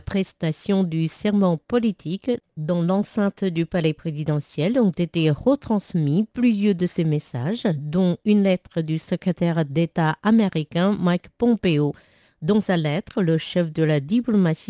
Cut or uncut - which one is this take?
uncut